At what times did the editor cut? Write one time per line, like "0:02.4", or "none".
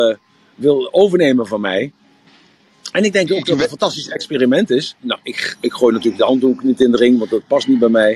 0:04.9

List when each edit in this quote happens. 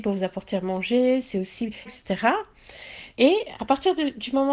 0:01.9
0:03.1

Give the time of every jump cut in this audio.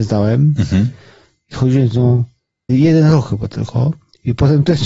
0:02.7

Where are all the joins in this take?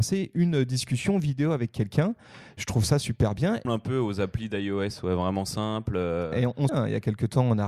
0:03.6
0:06.7

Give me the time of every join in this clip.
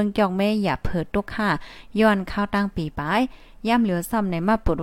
none

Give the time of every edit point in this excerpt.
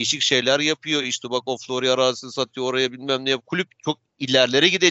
none

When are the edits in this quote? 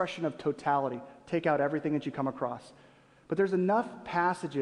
none

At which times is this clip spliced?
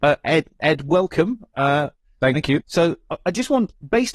0:02.6

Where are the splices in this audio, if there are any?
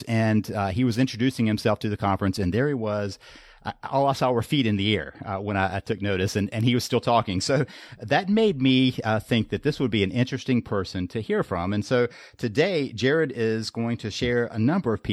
none

